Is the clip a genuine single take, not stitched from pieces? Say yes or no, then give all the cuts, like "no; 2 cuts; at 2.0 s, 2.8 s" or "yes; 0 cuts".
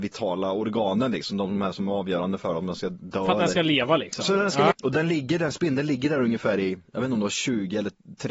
no; 1 cut; at 4.7 s